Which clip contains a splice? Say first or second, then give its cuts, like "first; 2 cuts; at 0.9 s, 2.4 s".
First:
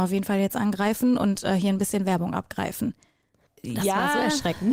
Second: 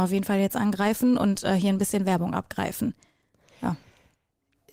first; 1 cut; at 3.5 s